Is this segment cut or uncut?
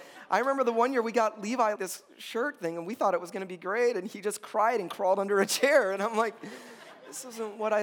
cut